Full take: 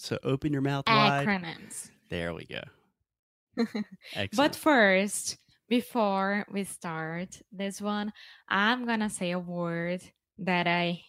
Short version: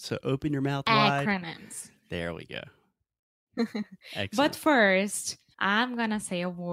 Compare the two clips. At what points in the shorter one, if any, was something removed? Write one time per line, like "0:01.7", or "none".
0:05.5